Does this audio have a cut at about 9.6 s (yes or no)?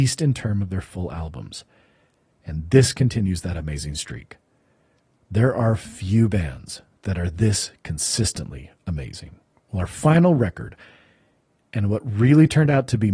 no